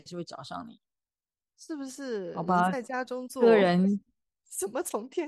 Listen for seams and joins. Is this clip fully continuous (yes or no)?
no